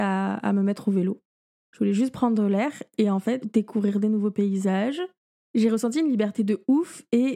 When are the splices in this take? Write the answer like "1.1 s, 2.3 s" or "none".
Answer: 3.4 s

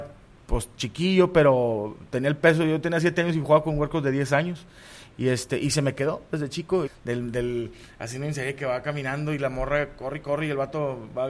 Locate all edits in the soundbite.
6.9 s

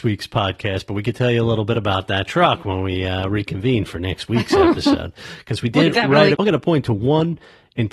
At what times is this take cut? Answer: 6.3 s

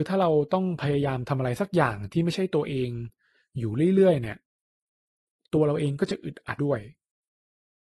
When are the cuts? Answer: 6.6 s

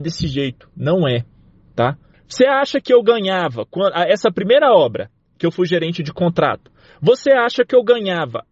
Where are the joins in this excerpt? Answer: 2.1 s

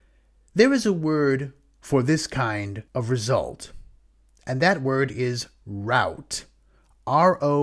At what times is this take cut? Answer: 2.9 s

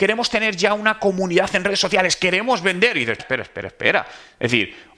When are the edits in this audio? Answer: 3.2 s

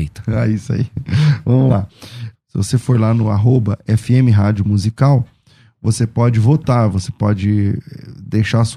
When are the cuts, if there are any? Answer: 2.3 s

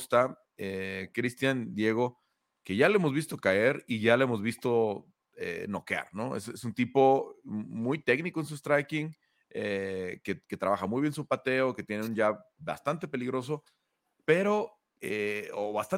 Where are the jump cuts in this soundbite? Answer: none

